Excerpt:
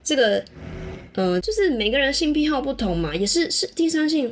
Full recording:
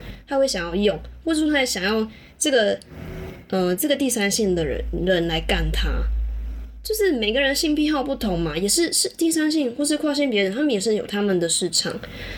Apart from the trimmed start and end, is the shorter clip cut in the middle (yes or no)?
yes